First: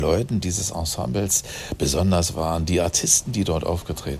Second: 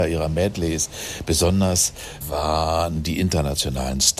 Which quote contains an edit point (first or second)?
second